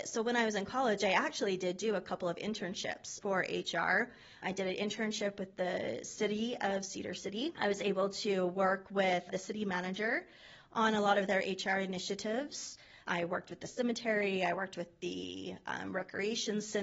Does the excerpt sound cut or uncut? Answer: uncut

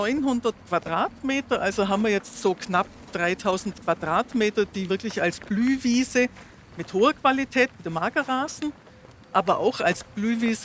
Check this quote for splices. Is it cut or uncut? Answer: uncut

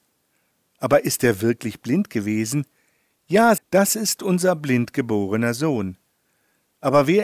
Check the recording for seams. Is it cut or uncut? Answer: cut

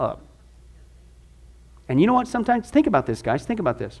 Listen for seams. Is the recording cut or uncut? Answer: uncut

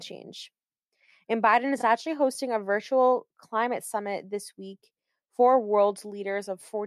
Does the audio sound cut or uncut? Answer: uncut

